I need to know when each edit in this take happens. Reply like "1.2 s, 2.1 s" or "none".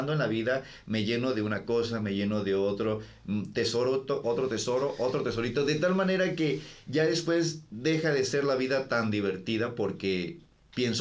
4.2 s